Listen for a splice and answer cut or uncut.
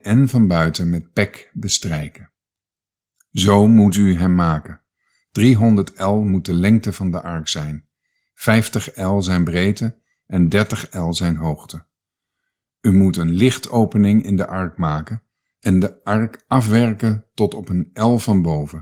uncut